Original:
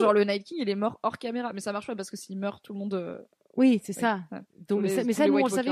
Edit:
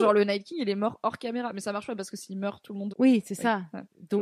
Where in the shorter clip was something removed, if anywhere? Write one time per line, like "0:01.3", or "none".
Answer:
0:02.9

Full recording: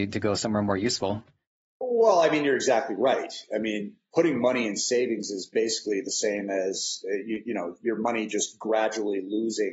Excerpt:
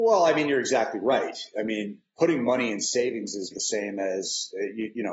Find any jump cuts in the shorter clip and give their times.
0:03.5

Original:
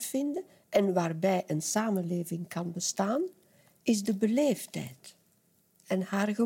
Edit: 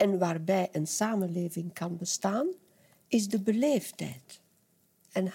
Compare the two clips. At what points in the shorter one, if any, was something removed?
none

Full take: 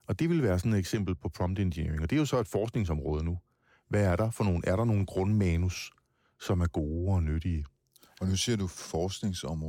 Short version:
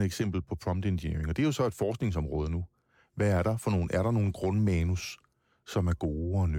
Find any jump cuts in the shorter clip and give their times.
none

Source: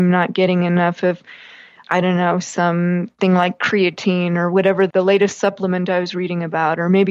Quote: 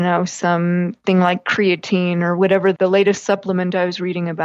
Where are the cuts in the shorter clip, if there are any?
none

